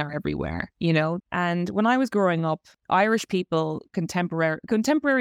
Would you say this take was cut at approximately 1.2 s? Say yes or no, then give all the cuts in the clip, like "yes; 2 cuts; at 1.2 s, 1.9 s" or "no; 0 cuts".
yes; 1 cut; at 1.2 s